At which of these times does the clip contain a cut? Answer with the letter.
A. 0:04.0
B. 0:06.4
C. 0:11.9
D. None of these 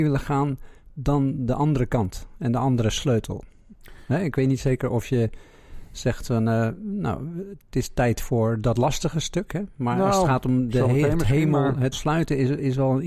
C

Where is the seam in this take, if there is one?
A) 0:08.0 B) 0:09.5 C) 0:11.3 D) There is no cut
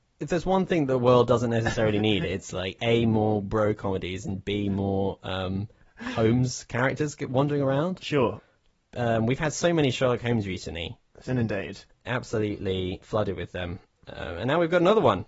C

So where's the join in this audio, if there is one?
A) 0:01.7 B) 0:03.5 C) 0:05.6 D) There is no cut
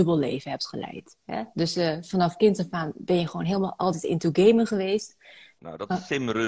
C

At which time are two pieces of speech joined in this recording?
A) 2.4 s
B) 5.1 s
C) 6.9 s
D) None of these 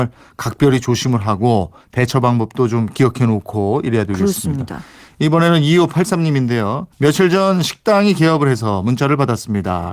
C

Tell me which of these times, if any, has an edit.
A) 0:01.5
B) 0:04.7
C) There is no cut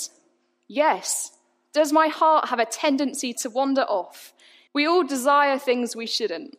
B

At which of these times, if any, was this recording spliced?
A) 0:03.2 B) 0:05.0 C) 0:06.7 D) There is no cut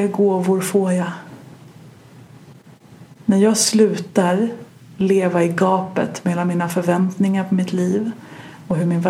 D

